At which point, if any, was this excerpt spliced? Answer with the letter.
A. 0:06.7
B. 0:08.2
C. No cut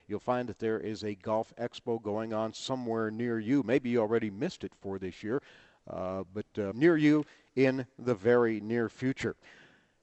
A